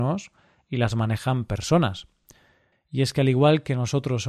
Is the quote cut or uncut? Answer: cut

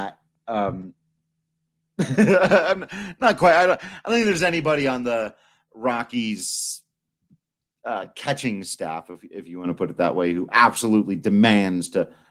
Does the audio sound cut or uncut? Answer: uncut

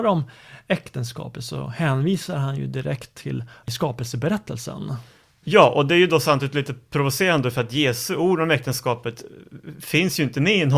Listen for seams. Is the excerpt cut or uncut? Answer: uncut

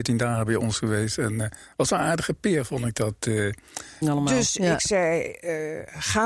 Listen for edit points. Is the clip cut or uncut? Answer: cut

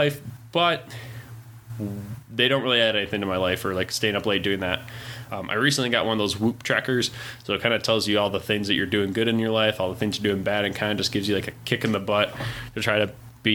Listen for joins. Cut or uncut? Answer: cut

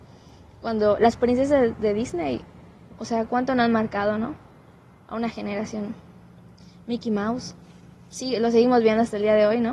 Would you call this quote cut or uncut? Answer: cut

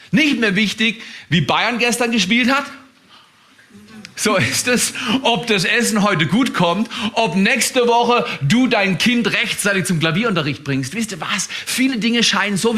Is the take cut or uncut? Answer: uncut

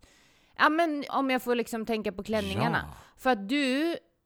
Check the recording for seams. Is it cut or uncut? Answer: cut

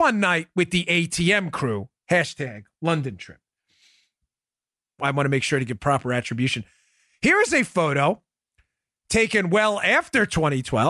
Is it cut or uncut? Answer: cut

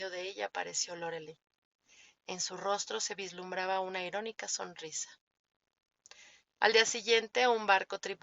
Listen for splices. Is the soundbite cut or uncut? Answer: cut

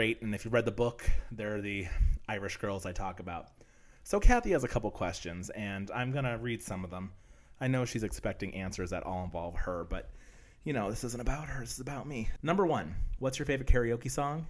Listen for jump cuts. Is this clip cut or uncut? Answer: cut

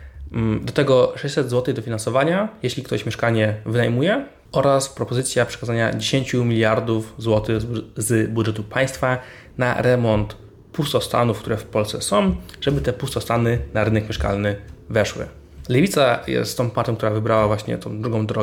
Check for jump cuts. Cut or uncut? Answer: uncut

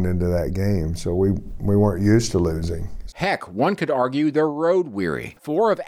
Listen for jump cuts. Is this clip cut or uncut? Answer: cut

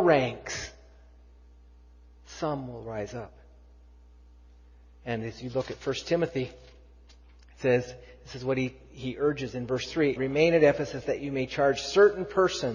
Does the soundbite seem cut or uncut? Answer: cut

